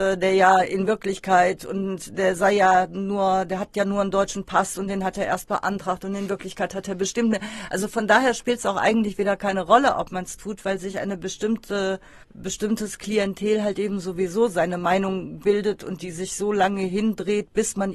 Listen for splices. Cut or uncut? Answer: cut